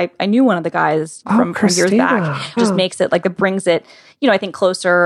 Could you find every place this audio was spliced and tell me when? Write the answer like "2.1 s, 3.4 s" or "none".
1.2 s, 2.6 s